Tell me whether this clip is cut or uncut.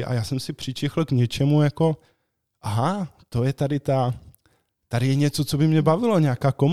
uncut